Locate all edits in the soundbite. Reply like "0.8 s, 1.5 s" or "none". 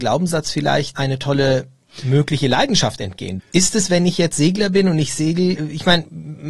0.9 s, 3.4 s